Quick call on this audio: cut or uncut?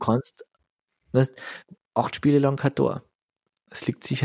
cut